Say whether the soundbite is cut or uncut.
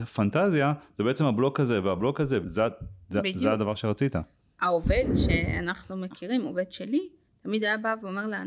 cut